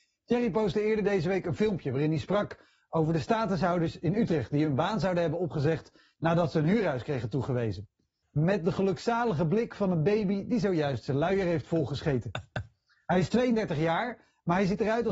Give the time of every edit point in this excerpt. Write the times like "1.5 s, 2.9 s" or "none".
8.2 s